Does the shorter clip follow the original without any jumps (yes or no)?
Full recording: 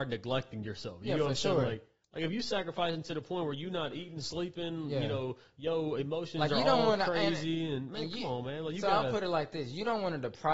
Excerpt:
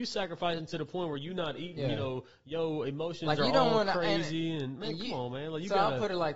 no